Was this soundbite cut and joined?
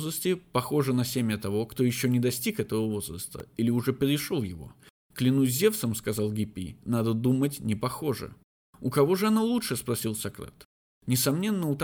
no; 0 cuts

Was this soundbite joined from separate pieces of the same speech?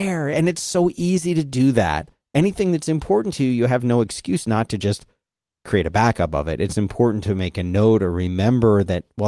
no; 0 cuts

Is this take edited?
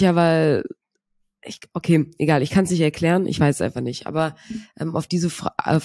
no; 0 cuts

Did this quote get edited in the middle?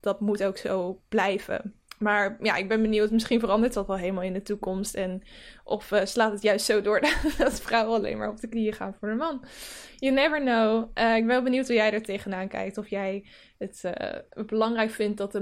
no; 0 cuts

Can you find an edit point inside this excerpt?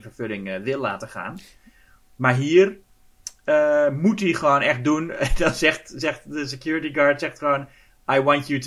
no; 0 cuts

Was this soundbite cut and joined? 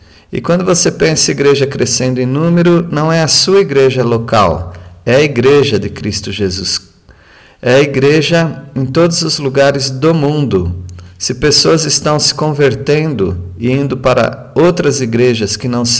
no; 0 cuts

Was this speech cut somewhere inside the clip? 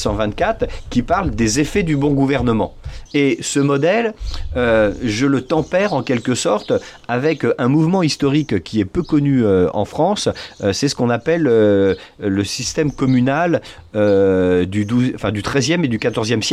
yes; 1 cut; at 3.1 s

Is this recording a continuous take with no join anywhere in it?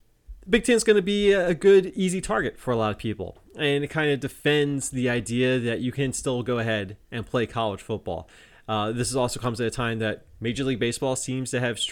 yes; 0 cuts

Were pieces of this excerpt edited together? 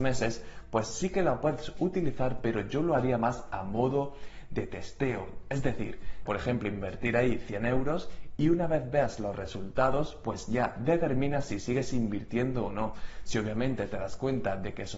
yes; 1 cut; at 6.3 s

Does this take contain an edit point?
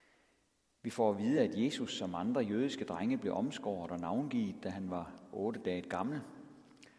no; 0 cuts

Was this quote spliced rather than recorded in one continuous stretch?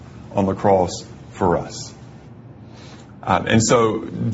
no; 0 cuts

